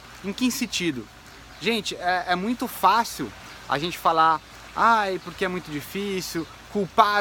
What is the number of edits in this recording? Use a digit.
0